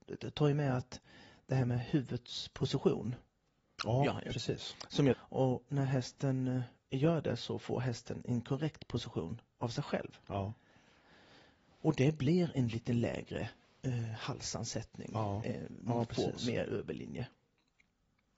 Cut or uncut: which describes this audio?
cut